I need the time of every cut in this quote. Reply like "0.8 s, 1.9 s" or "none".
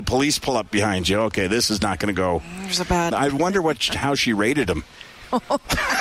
3.1 s